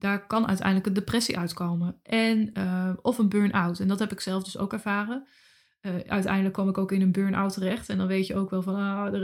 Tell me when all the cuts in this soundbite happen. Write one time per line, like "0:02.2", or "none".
none